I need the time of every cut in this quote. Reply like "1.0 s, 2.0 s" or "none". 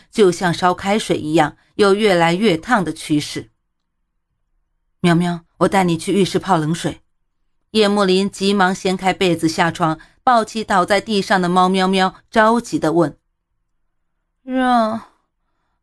5.5 s, 7.6 s